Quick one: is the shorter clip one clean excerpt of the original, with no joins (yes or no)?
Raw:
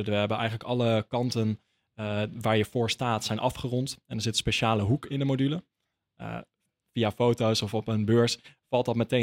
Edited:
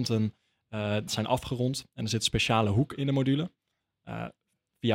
no